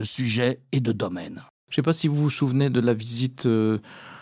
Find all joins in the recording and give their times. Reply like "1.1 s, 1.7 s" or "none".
none